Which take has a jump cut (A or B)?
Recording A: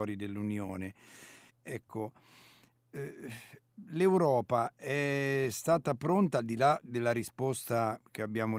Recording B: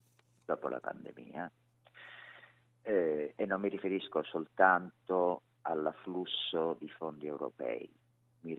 A